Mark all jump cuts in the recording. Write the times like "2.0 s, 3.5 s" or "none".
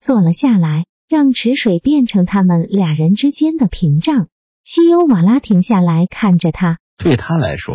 6.9 s